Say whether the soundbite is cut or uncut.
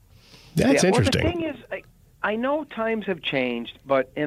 uncut